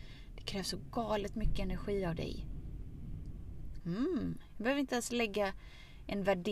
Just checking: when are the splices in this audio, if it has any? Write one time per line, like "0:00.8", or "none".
0:03.8